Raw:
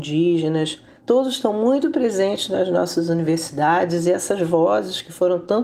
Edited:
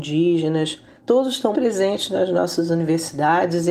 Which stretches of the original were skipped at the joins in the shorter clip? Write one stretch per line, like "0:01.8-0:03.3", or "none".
0:01.5-0:01.9